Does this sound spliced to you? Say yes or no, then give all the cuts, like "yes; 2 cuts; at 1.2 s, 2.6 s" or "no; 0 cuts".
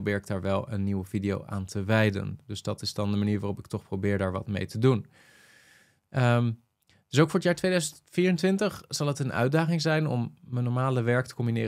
no; 0 cuts